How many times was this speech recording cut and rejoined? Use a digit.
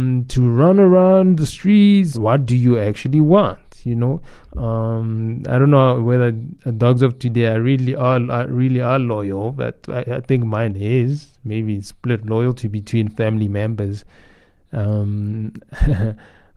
2